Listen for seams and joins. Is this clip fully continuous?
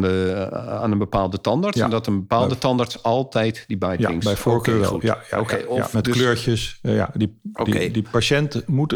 yes; 0 cuts

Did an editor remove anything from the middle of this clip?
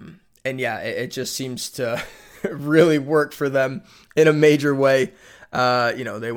no; 0 cuts

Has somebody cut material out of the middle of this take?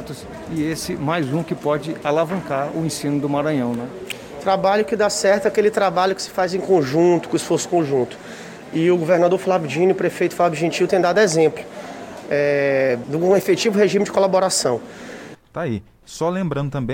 yes; 2 cuts; at 13.0 s, 15.3 s

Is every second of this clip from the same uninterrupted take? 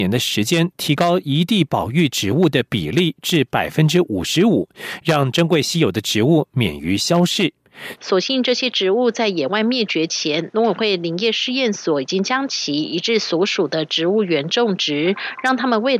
no; 1 cut; at 7.9 s

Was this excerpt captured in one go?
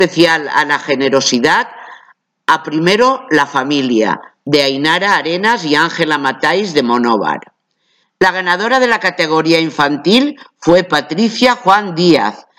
no; 1 cut; at 8.0 s

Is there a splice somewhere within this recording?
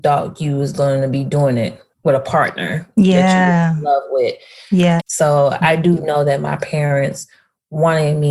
yes; 2 cuts; at 1.9 s, 5.0 s

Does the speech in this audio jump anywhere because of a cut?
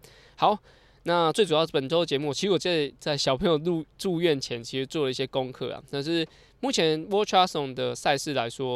no; 0 cuts

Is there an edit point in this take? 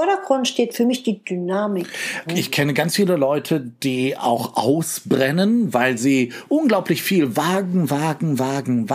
yes; 1 cut; at 2.3 s

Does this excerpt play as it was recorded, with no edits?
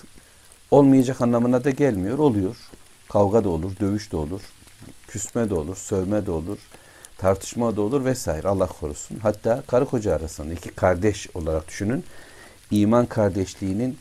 yes; 0 cuts

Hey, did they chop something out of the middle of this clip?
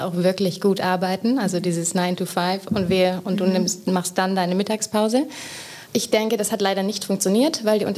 yes; 1 cut; at 5.9 s

